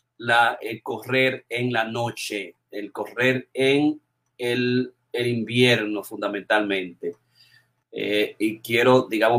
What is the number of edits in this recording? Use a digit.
1